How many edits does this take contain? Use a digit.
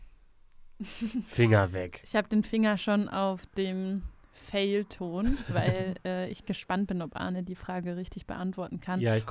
0